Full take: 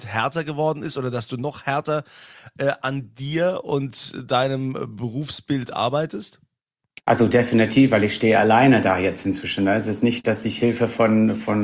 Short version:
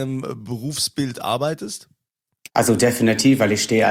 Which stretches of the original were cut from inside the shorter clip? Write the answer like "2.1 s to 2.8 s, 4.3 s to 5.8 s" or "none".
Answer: none